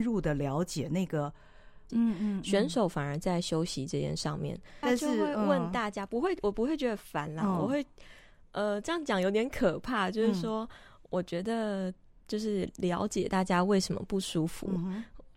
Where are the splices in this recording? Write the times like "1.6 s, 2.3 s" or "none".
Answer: 1.9 s, 4.8 s

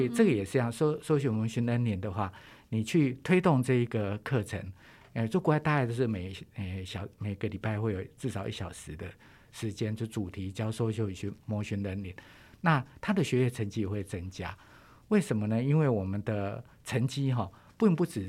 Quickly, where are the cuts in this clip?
none

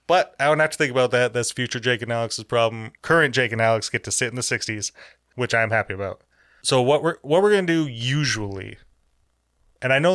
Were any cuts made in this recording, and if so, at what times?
3.0 s

